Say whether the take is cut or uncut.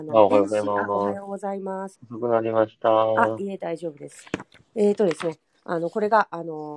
cut